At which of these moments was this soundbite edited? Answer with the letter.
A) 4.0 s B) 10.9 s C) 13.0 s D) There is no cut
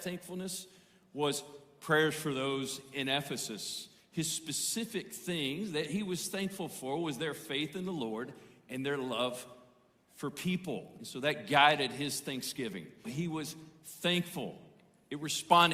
C